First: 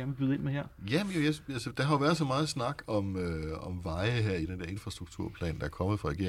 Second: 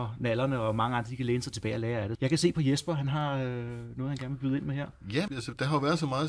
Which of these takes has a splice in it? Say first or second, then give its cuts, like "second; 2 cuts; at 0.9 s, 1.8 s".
second; 2 cuts; at 2.1 s, 5.3 s